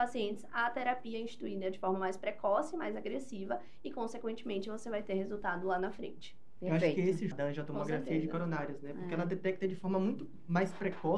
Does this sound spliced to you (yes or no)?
yes